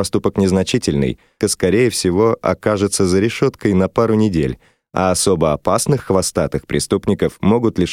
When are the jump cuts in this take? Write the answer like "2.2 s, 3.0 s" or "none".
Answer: 1.4 s